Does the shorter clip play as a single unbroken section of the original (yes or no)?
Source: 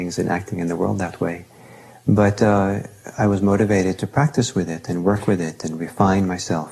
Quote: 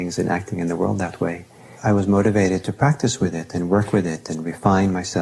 no